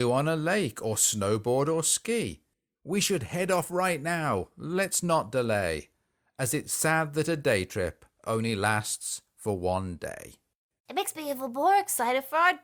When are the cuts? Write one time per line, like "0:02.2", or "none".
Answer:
0:10.8